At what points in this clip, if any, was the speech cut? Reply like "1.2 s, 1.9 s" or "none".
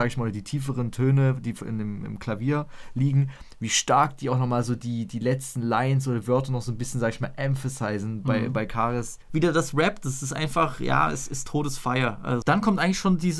9.3 s, 12.4 s